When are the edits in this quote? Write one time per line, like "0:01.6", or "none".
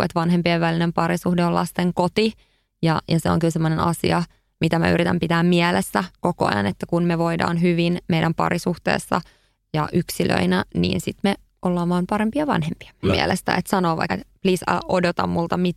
0:13.0
0:14.1